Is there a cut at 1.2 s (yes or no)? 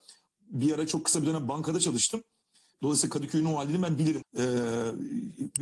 no